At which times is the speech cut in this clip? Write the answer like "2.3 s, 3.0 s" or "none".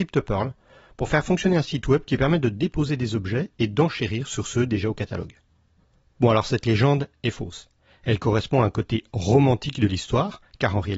6.2 s